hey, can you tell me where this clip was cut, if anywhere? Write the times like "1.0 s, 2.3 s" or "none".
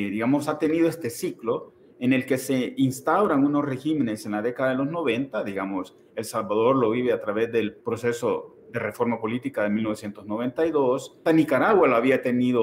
7.8 s, 11.3 s